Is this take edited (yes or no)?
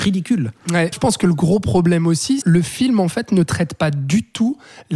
yes